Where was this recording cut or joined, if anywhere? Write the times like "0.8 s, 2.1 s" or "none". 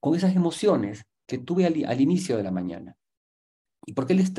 none